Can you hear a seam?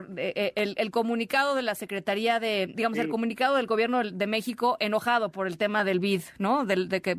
yes; 1 cut; at 2.7 s

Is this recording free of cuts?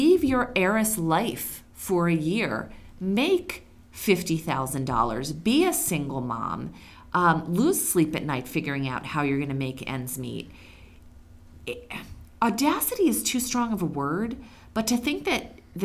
yes; 0 cuts

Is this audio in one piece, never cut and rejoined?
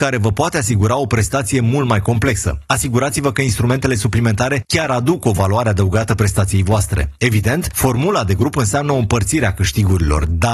yes; 0 cuts

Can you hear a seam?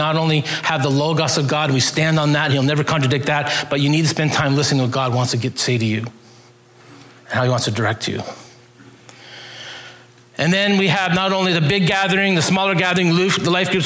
no; 0 cuts

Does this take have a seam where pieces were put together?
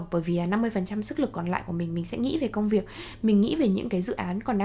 no; 0 cuts

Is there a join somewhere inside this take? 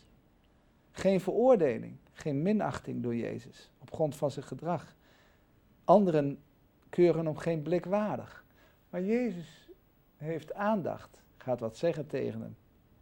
yes; 1 cut; at 11.3 s

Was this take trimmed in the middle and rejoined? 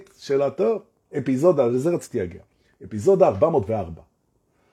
no; 0 cuts

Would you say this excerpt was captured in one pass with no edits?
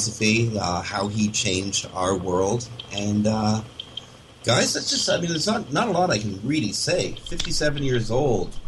yes; 0 cuts

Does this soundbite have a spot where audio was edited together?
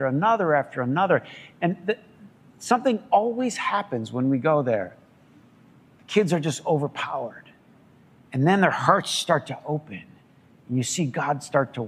no; 0 cuts

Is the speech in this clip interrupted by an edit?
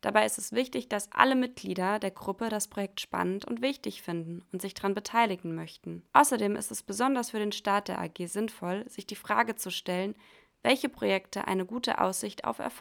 yes; 1 cut; at 6.1 s

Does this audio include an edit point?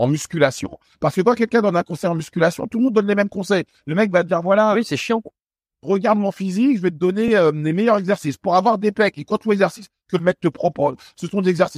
no; 0 cuts

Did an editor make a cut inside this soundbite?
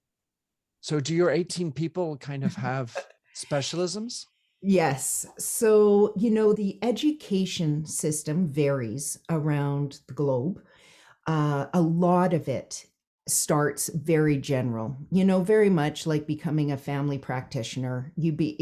yes; 1 cut; at 6.5 s

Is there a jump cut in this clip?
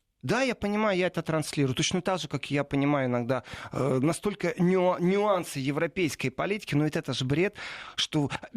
no; 0 cuts

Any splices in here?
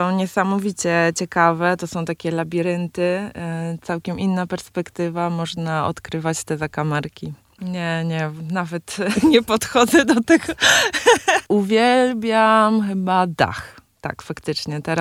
yes; 2 cuts; at 7.6 s, 11.5 s

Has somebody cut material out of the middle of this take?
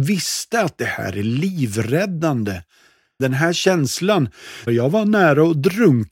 yes; 2 cuts; at 3.2 s, 4.7 s

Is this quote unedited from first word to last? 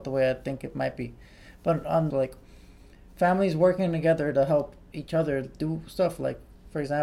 no; 1 cut; at 2.1 s

